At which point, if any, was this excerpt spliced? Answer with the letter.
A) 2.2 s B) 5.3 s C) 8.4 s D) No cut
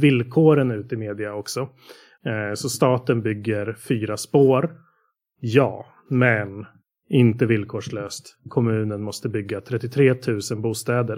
A